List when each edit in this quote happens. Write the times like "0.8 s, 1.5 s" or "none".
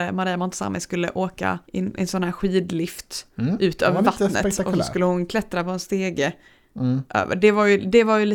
1.6 s

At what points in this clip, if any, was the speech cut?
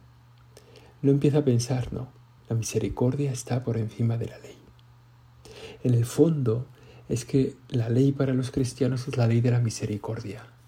2.4 s

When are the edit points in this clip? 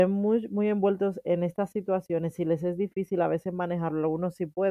none

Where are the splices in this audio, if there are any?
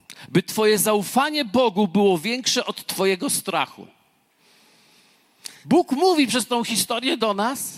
5.6 s

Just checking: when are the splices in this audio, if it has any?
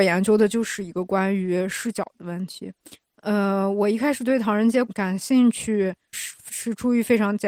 4.9 s, 6.1 s

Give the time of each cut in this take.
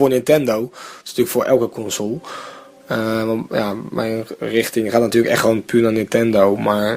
none

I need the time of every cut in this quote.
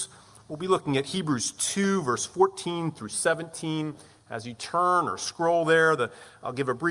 none

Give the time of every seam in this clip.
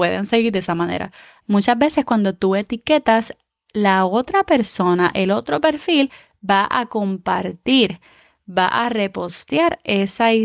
1.4 s

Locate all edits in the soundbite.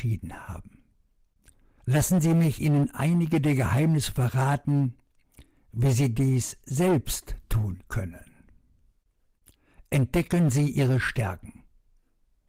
1.8 s

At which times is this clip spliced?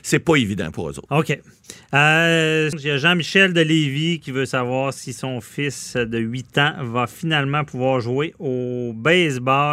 1.1 s, 2.7 s

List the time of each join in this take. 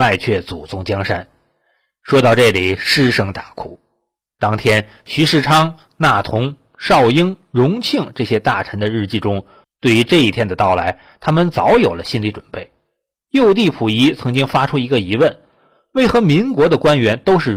9.6 s

